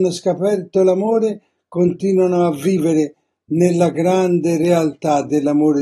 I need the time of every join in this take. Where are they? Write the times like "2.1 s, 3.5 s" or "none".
none